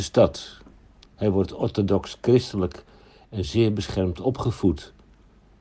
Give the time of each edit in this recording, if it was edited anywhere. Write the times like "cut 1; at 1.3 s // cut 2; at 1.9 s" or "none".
cut 1; at 1.0 s

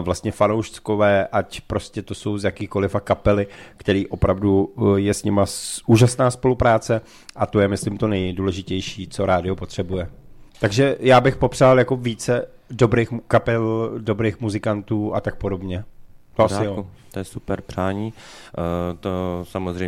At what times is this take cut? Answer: cut 1; at 10.5 s

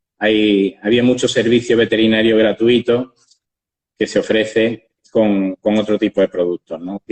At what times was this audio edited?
none

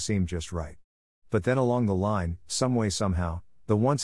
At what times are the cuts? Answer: none

